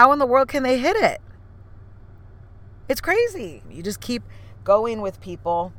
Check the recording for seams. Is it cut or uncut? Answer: cut